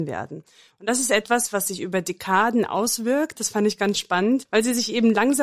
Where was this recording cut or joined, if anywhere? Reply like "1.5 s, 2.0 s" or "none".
3.3 s